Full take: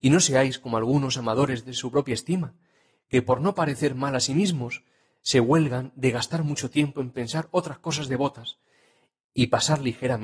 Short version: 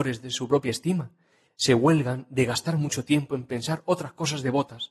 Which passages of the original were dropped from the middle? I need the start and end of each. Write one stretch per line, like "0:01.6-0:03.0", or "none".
0:02.9-0:05.1